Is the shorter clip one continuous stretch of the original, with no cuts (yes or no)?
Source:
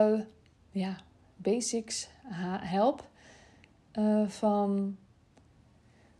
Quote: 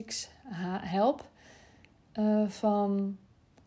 yes